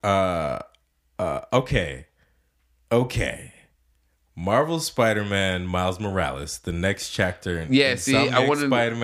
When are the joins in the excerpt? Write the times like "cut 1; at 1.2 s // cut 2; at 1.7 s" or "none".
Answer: none